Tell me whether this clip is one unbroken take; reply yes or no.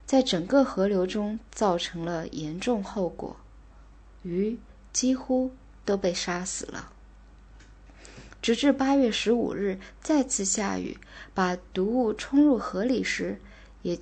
yes